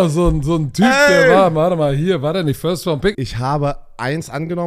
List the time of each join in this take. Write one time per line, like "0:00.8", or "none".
0:03.1